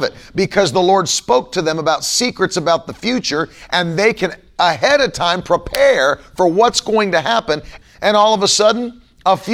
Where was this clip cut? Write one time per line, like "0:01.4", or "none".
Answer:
0:07.8